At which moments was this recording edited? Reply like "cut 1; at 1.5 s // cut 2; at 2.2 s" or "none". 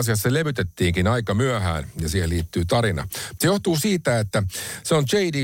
cut 1; at 3.4 s